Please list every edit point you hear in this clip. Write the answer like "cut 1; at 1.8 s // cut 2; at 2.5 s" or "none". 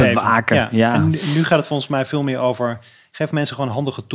none